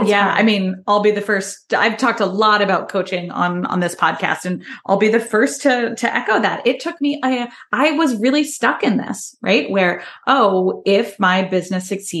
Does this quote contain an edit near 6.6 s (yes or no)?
no